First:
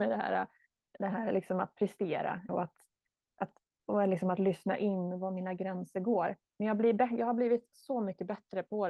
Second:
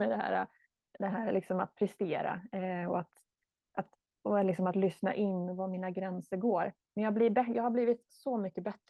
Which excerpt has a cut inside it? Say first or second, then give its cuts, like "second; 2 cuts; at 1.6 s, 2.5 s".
first; 1 cut; at 2.5 s